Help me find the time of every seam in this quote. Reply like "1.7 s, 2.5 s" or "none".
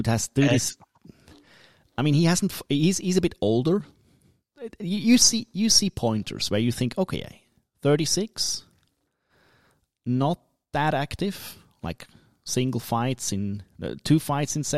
none

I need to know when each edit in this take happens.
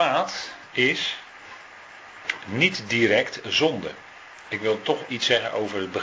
5.1 s

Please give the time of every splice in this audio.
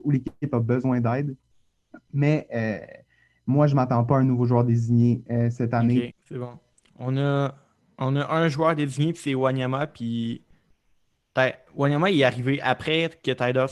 6.1 s

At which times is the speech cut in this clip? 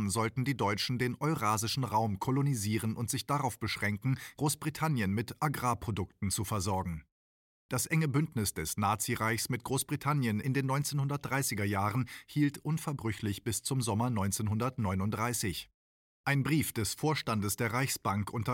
none

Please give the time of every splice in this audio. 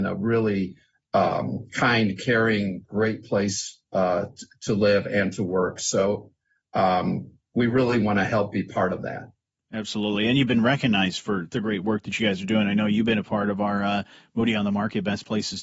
none

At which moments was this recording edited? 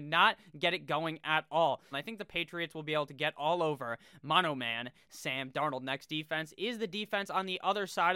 1.9 s

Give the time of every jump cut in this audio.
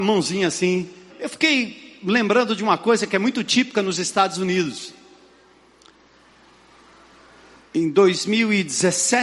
1.1 s

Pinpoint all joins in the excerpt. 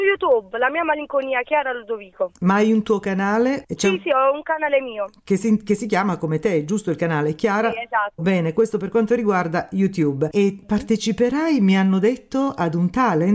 8.2 s, 10.3 s

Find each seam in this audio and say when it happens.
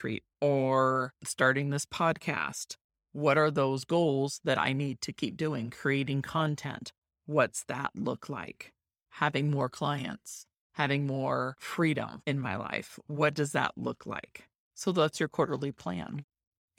none

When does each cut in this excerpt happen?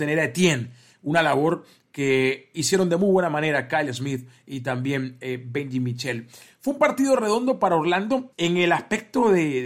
8.3 s

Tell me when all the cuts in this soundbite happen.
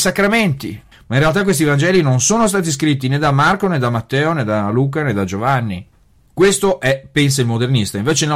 0.9 s

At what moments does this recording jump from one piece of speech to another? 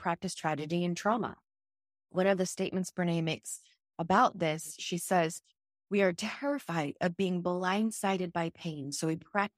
2.0 s

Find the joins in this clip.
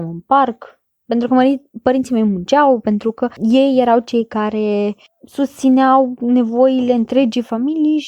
none

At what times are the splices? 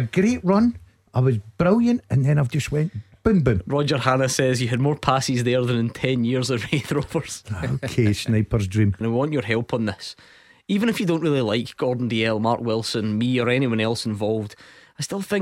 9.0 s

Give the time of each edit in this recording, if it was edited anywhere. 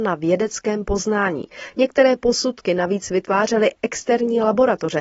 none

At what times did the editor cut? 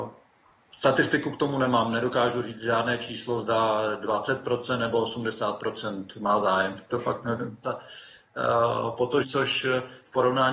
7.6 s, 9.2 s

